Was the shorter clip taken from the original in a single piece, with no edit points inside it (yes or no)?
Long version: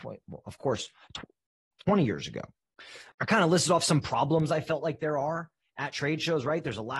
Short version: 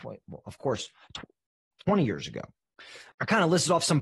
yes